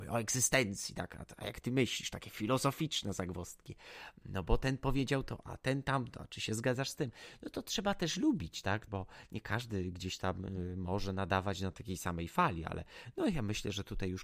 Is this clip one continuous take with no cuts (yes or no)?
no